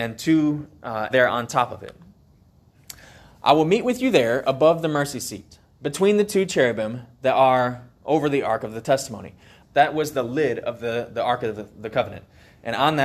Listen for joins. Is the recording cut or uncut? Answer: cut